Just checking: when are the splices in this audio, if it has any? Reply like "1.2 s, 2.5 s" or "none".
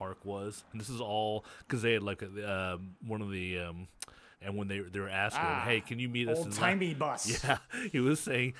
4.3 s